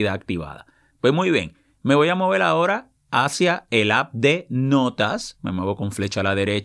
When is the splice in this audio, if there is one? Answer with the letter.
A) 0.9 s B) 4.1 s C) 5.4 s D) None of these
A